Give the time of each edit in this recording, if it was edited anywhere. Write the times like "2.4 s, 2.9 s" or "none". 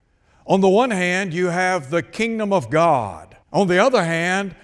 3.4 s